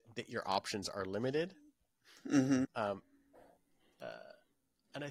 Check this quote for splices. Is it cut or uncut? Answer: cut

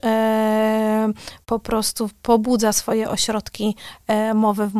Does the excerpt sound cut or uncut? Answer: cut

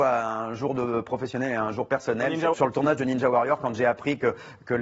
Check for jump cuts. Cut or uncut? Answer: cut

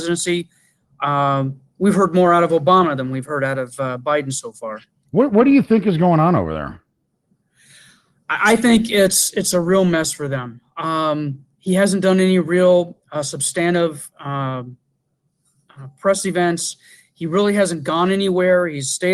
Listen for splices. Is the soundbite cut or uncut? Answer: uncut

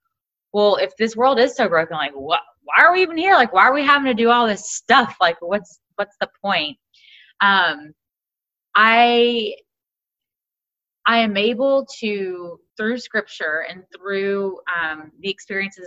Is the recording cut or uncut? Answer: cut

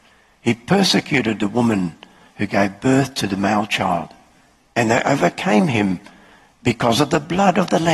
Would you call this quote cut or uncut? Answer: cut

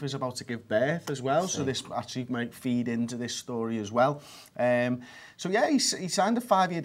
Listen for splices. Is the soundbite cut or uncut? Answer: uncut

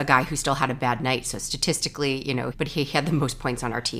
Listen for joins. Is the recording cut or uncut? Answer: cut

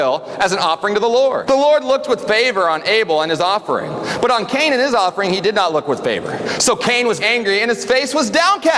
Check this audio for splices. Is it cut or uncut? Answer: cut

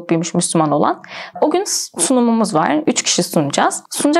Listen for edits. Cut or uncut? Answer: cut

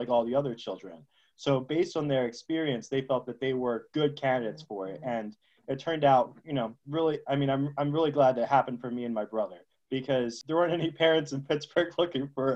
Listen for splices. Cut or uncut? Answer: uncut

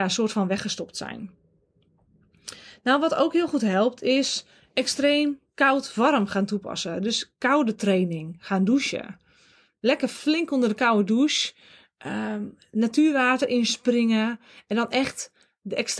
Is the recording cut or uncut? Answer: uncut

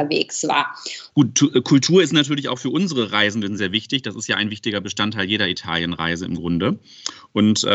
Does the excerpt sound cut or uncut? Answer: cut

